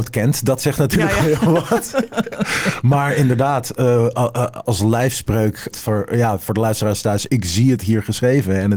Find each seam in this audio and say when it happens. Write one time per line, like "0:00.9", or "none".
0:04.6
0:05.7
0:07.3

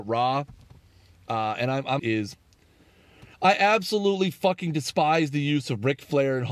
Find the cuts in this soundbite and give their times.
0:02.0
0:03.3

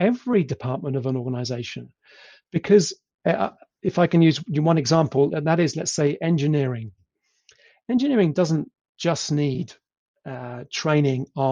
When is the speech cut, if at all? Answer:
0:05.3

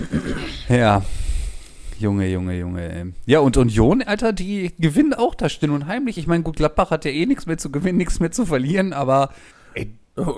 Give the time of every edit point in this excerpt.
none

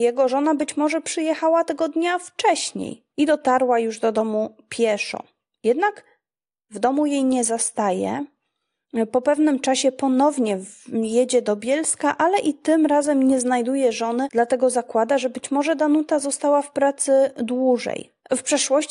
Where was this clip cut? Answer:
none

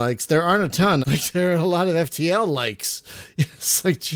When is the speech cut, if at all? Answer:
0:01.0

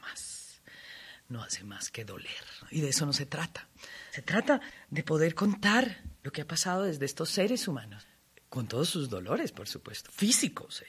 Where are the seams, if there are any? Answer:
none

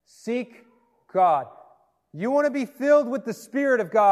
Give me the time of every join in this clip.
none

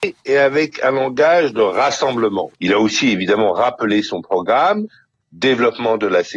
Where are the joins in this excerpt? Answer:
0:02.5
0:05.2

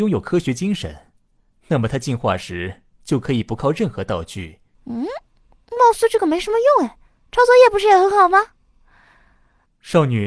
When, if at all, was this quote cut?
0:04.7

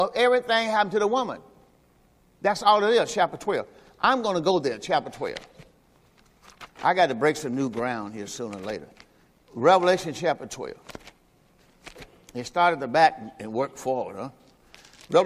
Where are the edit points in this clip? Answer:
0:06.7

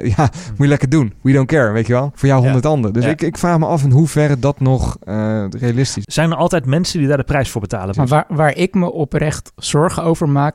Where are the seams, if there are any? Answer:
0:06.0
0:07.9

